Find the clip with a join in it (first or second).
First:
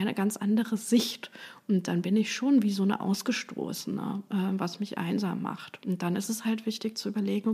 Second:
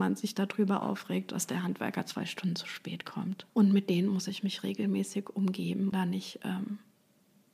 second